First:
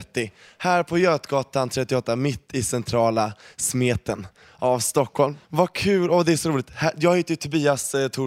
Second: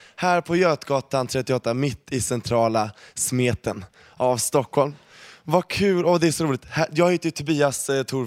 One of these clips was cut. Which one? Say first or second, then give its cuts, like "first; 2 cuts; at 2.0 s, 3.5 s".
first; 1 cut; at 5.4 s